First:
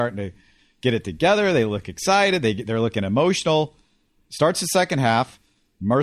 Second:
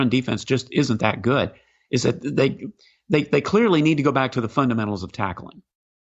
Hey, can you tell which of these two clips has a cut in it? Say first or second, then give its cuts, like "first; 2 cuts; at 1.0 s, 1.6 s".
first; 1 cut; at 4.3 s